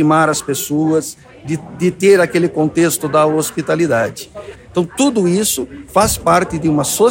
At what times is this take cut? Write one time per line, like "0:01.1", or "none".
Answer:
0:04.5